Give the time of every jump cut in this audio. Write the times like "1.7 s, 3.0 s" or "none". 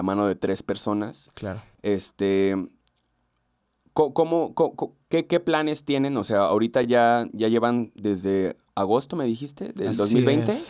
none

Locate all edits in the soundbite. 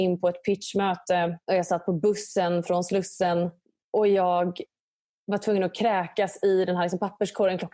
1.4 s

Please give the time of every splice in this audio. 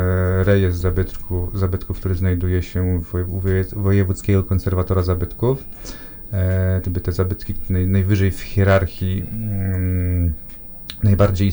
6.8 s

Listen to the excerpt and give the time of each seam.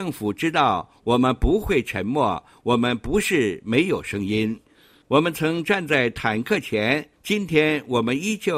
4.6 s, 7.1 s

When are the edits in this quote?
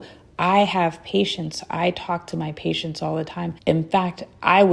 3.6 s

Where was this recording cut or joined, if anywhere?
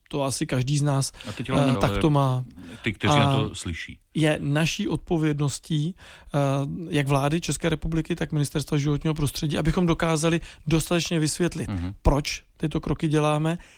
1.7 s

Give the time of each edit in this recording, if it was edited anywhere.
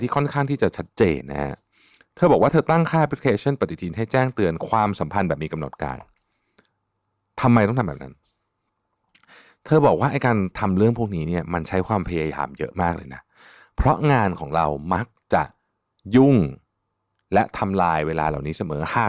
1.2 s

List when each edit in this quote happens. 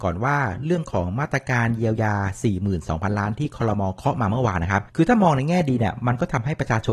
4.9 s

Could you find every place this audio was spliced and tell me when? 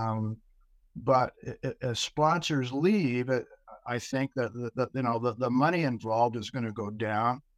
none

